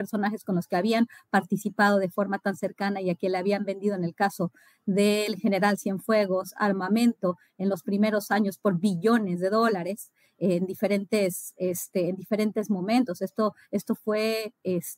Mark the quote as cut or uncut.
uncut